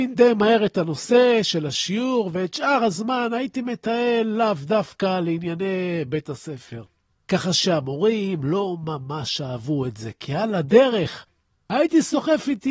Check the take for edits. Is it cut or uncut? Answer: uncut